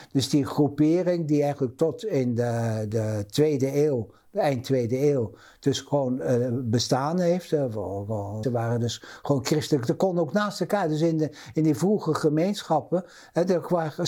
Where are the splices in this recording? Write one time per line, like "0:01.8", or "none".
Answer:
0:02.9
0:08.4